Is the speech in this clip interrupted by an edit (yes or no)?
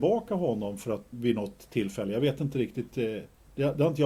yes